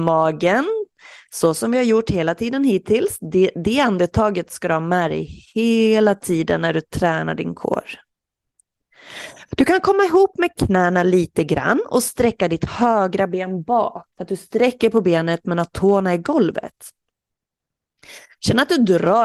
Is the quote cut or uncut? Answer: cut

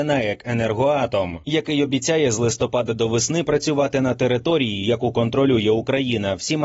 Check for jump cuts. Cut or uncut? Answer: uncut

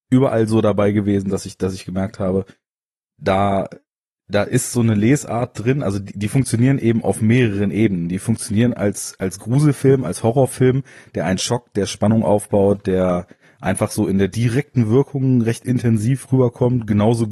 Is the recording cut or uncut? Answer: uncut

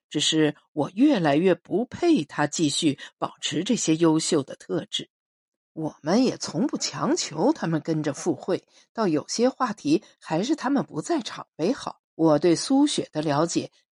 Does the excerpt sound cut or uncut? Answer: cut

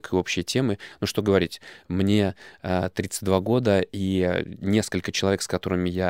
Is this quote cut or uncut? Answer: uncut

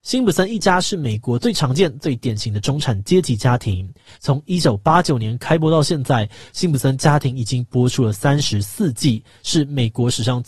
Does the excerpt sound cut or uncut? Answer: cut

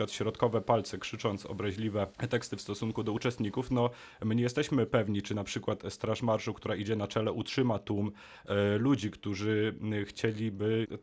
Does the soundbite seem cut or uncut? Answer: uncut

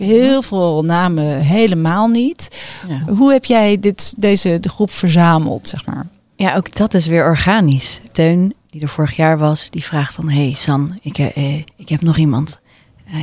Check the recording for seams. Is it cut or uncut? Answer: cut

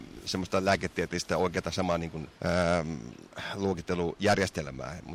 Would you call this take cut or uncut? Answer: cut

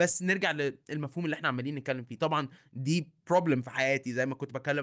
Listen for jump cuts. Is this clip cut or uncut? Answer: uncut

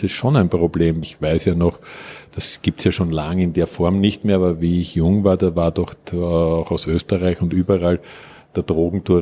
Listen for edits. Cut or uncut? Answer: cut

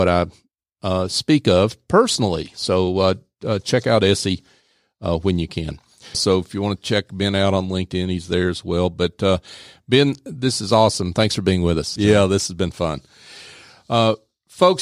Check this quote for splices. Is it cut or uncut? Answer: cut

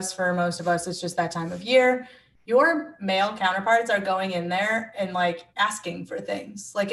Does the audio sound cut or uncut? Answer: cut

